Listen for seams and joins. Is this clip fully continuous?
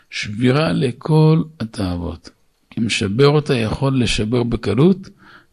yes; 0 cuts

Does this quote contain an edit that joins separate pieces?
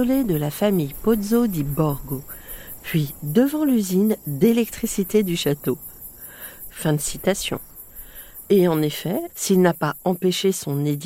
yes; 2 cuts; at 6.7 s, 9.3 s

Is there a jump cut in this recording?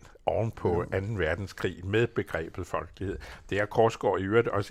no; 0 cuts

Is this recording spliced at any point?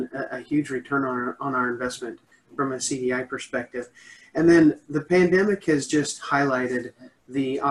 no; 0 cuts

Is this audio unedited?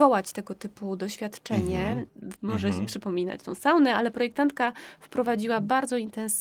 no; 1 cut; at 2.4 s

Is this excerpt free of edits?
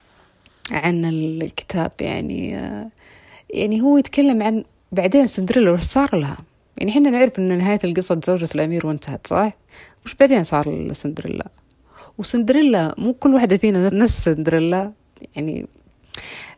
no; 1 cut; at 13.9 s

